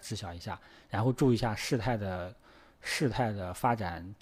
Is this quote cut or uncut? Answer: uncut